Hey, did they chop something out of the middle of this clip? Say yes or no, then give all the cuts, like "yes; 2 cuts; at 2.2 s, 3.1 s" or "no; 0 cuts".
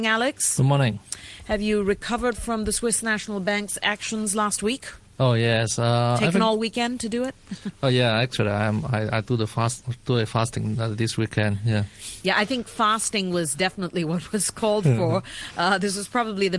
no; 0 cuts